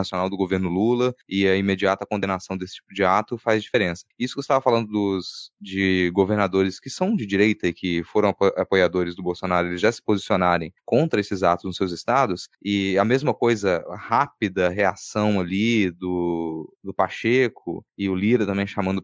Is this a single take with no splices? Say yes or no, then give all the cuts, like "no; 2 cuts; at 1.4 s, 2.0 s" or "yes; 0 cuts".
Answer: yes; 0 cuts